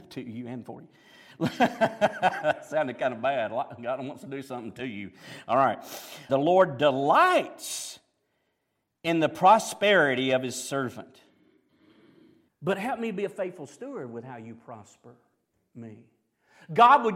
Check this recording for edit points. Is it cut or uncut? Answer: cut